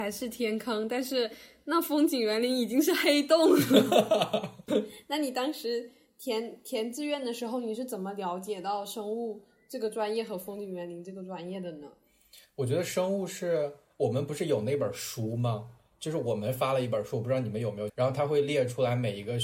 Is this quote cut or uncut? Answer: cut